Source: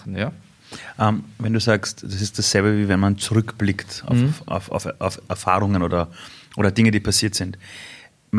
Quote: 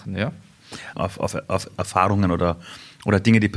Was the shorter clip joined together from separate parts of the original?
yes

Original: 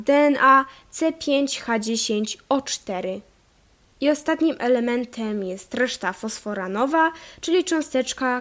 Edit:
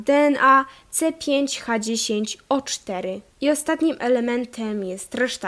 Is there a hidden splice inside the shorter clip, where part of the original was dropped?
yes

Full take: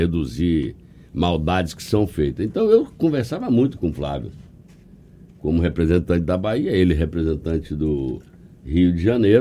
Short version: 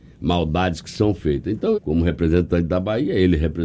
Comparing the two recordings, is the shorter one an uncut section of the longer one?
no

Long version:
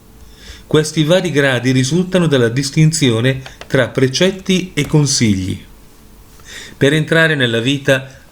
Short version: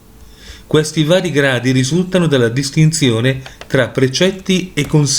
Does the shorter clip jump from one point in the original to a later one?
no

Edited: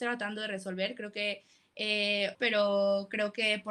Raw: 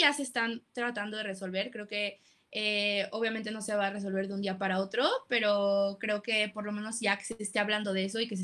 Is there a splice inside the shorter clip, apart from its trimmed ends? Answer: yes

